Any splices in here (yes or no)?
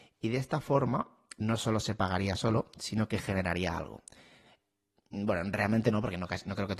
no